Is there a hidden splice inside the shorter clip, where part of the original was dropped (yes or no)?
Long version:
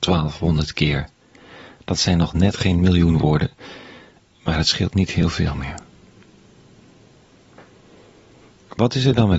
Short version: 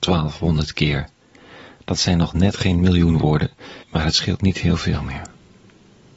yes